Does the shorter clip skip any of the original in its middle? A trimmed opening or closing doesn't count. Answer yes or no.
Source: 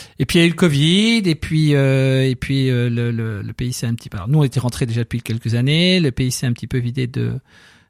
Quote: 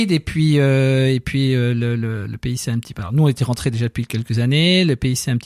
no